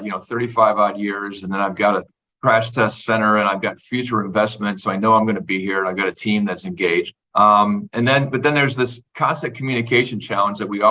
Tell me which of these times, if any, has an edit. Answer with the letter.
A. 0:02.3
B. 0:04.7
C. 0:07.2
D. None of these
C